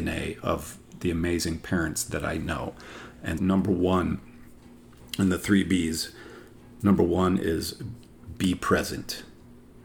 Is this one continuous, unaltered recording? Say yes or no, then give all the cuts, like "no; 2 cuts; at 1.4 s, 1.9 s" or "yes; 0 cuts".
no; 1 cut; at 3.4 s